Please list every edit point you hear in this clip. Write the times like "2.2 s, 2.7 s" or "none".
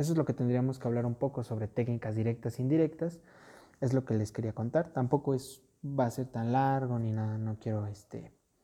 none